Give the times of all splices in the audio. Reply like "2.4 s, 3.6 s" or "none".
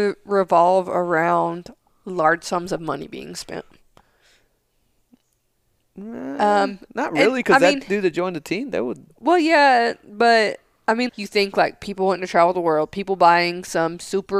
11.1 s